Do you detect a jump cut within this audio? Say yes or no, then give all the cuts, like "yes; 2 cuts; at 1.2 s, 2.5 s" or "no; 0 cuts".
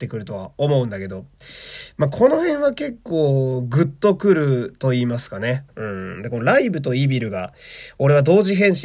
yes; 1 cut; at 5.7 s